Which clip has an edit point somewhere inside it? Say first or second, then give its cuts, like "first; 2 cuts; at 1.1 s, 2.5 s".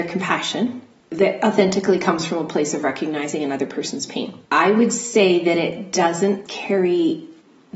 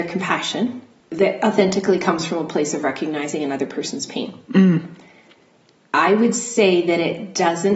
first; 2 cuts; at 4.5 s, 6.5 s